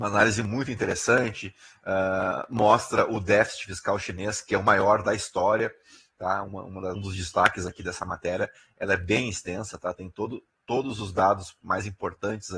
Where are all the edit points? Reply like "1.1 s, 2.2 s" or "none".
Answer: 6.9 s